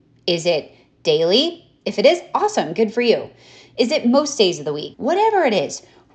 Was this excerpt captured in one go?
no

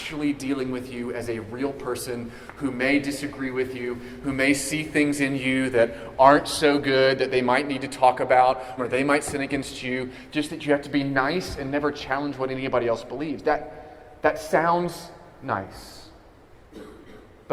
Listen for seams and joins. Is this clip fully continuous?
no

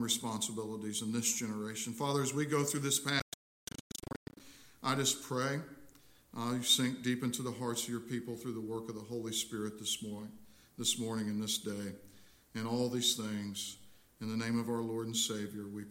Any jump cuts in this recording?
no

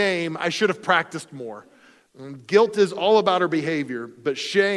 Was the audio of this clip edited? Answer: yes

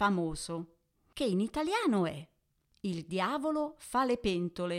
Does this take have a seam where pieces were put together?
no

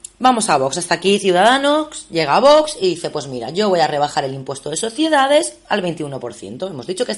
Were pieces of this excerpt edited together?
no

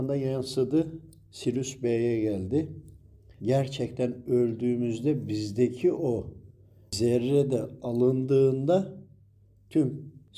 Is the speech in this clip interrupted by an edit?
yes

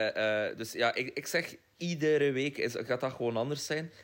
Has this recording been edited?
no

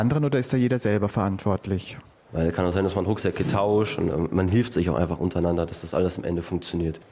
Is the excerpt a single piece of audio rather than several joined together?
no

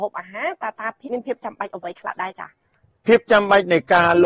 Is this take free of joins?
no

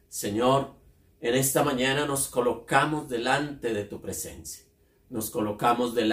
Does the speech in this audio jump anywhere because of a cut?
no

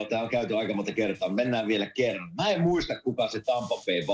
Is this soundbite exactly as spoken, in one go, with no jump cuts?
yes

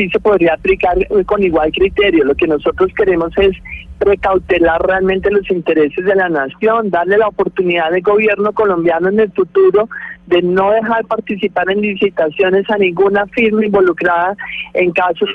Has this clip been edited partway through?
no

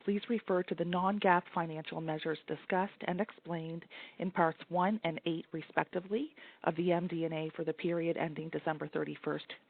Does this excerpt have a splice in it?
no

